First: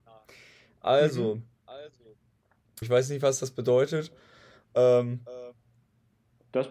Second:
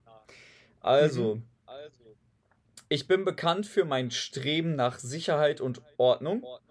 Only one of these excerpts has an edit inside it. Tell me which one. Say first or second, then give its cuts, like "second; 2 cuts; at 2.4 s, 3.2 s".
first; 1 cut; at 2.8 s